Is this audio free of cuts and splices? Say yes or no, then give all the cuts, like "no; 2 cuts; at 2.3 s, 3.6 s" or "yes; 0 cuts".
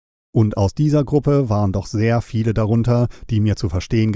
yes; 0 cuts